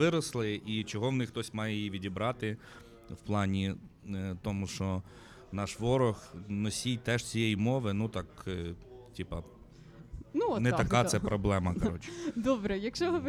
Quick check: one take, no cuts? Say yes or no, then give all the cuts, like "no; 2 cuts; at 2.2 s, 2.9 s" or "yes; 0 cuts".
yes; 0 cuts